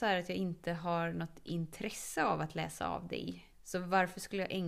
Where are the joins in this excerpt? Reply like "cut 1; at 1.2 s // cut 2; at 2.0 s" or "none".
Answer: cut 1; at 3.5 s